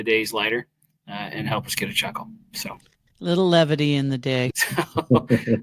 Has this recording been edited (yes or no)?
yes